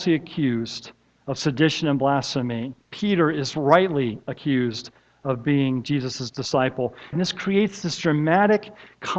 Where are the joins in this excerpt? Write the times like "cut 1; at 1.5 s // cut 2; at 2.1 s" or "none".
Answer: cut 1; at 2.8 s // cut 2; at 7.1 s